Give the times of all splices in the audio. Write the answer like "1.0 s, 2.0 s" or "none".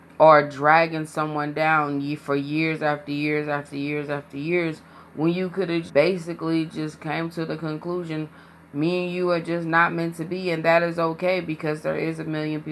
5.9 s